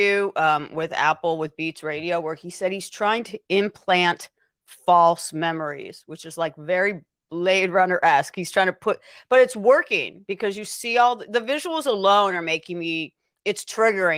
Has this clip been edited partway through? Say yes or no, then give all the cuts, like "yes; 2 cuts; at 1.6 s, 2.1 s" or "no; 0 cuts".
no; 0 cuts